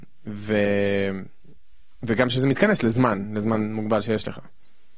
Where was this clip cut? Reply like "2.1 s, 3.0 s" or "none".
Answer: none